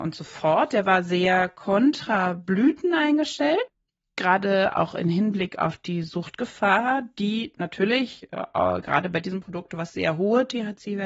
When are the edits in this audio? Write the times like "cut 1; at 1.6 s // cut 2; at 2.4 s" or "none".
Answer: none